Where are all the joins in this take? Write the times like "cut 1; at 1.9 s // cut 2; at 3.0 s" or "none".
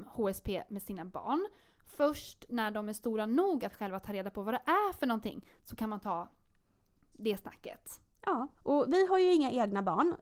cut 1; at 8.6 s